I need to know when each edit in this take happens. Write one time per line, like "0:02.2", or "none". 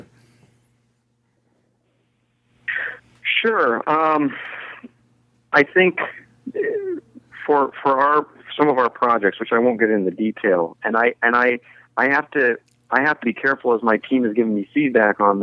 0:05.5
0:10.8
0:13.2

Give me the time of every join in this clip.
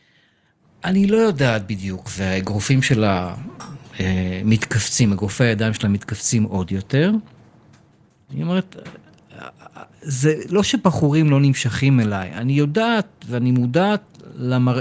0:02.1
0:08.3

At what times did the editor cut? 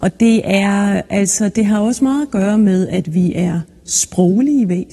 none

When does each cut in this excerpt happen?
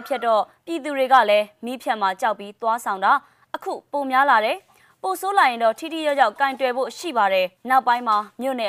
0:07.6

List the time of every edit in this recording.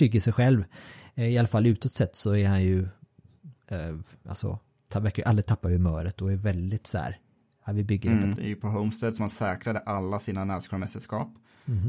0:03.6
0:08.4

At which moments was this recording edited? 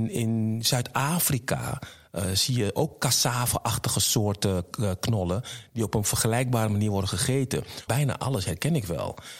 0:07.9

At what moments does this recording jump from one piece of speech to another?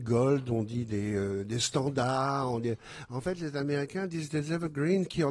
none

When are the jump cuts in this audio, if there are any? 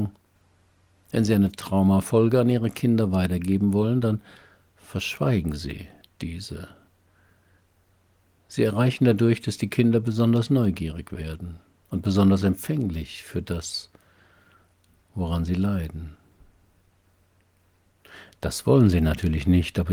none

